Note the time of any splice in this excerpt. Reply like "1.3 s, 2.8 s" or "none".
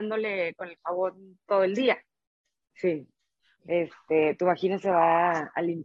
3.6 s